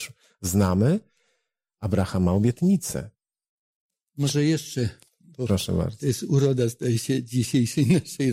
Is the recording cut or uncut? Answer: uncut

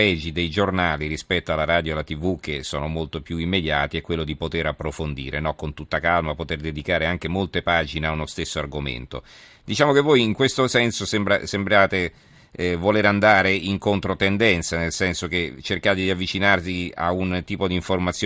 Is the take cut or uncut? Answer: uncut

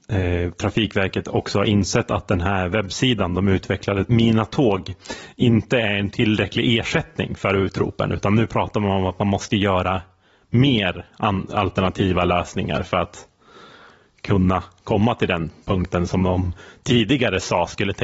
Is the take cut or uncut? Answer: uncut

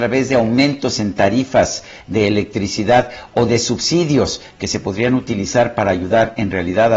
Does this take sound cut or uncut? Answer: uncut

